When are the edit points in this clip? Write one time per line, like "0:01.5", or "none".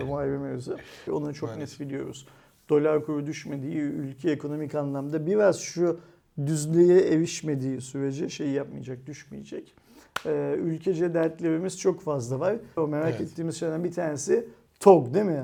0:01.1
0:12.8